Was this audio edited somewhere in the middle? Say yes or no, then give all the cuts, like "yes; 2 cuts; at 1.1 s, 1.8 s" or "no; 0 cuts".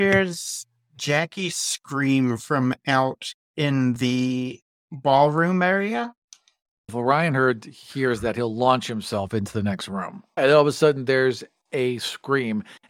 yes; 1 cut; at 10.4 s